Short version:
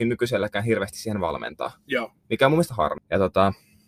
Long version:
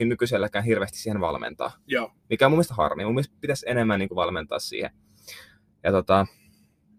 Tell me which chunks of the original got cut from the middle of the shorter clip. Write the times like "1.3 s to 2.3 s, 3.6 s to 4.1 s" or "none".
3.0 s to 5.7 s